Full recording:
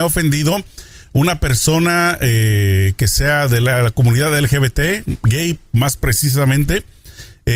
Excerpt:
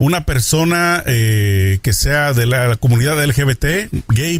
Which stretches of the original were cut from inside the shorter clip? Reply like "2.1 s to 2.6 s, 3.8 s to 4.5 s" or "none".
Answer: none

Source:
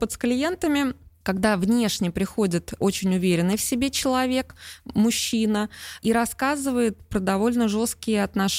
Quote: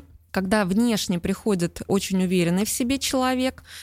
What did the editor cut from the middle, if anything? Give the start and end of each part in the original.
none

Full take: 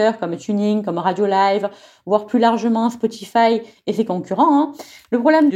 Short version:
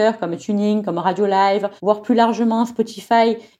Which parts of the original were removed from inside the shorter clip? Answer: 1.8 s to 2.0 s

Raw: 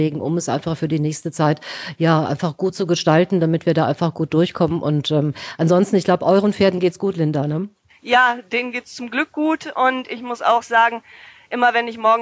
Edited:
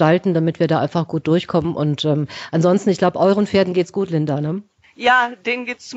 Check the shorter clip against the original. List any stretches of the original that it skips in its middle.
none

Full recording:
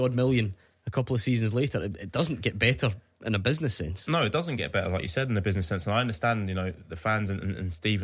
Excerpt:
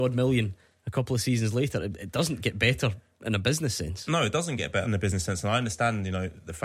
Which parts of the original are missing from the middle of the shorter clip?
4.8 s to 5.3 s

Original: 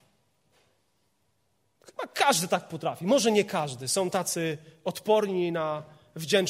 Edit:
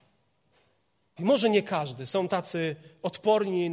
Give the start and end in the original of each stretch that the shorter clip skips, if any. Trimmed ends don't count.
1.2 s to 3.0 s

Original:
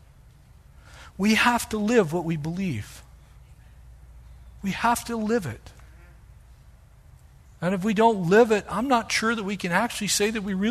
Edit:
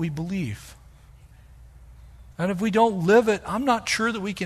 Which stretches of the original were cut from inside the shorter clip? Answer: 4.6 s to 7.6 s

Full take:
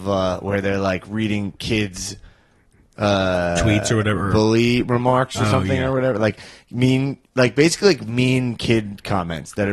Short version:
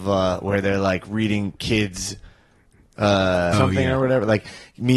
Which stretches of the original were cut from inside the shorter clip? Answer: 3.5 s to 5.5 s

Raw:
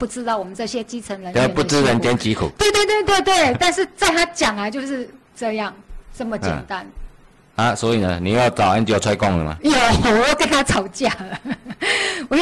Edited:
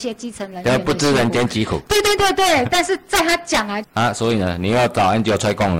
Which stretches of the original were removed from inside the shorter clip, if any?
2.9 s to 3.1 s, 4.7 s to 7.4 s

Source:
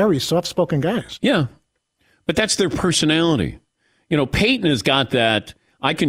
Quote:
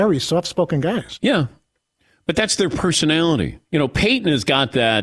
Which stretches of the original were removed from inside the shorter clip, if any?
3.7 s to 4.0 s

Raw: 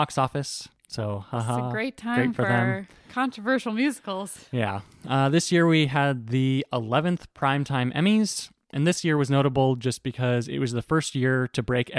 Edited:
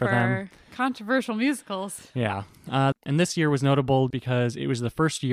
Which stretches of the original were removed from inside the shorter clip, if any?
5.3 s to 8.6 s, 9.8 s to 10.0 s

